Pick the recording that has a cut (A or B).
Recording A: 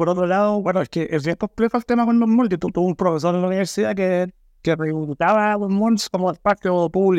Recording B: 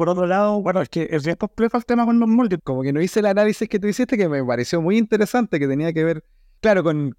B